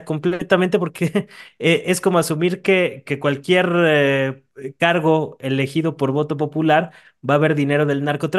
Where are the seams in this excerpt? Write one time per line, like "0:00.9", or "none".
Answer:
0:03.0